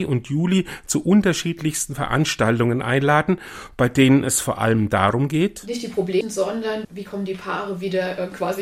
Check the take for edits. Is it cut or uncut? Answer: cut